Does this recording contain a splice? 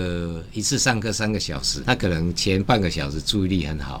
yes; 1 cut; at 1.8 s

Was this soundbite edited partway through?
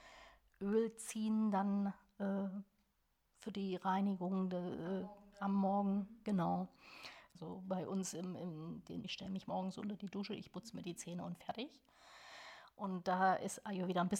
yes; 2 cuts; at 7.3 s, 9.0 s

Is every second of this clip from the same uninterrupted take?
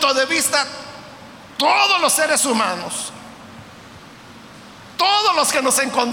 yes; 0 cuts

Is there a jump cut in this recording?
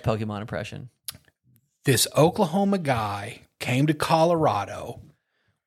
no; 0 cuts

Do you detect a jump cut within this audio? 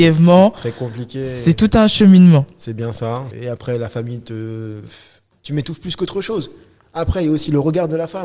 yes; 2 cuts; at 3.3 s, 5.3 s

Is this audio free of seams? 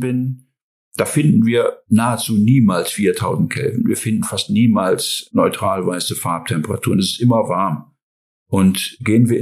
yes; 0 cuts

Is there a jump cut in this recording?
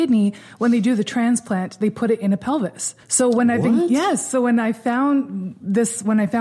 yes; 1 cut; at 3.0 s

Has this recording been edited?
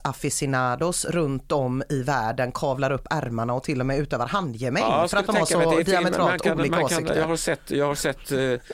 no; 0 cuts

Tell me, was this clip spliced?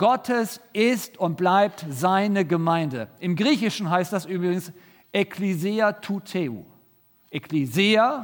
no; 0 cuts

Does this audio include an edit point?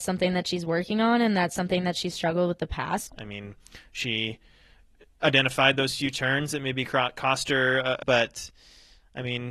yes; 2 cuts; at 3.1 s, 8.0 s

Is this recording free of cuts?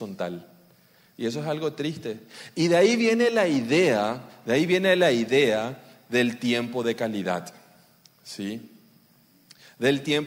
yes; 0 cuts

